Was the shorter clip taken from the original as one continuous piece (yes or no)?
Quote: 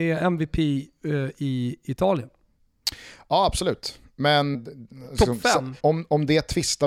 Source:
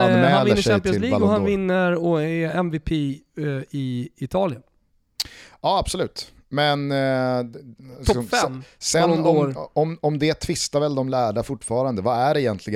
no